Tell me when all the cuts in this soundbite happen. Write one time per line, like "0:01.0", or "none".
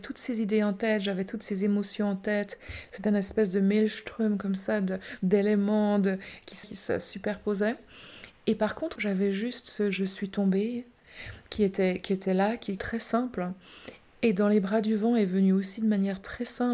0:06.6
0:09.0
0:12.8